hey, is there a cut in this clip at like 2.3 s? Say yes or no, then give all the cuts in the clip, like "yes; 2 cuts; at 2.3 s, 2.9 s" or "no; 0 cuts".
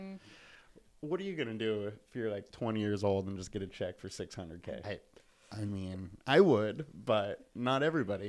no; 1 cut; at 4.8 s